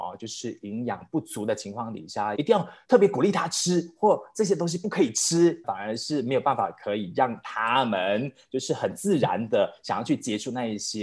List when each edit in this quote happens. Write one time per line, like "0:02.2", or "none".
0:02.3
0:05.6